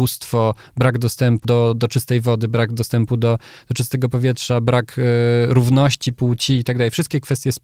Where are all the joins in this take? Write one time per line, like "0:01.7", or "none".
0:01.4